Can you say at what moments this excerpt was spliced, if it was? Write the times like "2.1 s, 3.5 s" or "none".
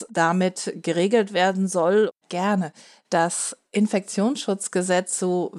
2.1 s